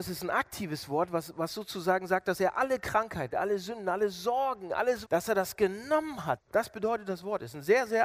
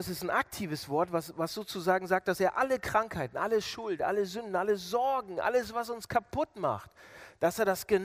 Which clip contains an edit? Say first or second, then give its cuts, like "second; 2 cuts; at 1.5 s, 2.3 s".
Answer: first; 3 cuts; at 3.3 s, 5.0 s, 6.4 s